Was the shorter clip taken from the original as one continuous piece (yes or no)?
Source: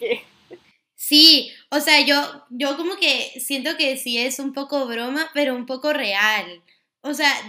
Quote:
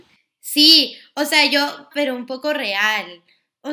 no